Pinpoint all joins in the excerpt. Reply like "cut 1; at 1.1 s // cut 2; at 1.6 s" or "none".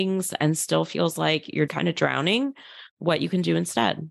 cut 1; at 1.7 s